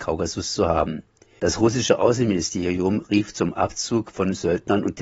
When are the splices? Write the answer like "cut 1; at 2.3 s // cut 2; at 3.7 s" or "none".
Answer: cut 1; at 1.4 s